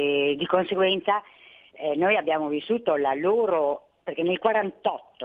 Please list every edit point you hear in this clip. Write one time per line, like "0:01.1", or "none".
none